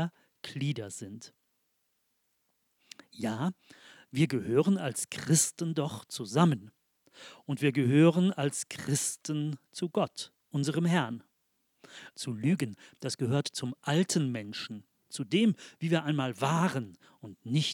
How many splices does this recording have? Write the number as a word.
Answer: two